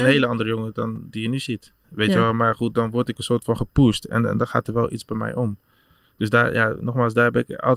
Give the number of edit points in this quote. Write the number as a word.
one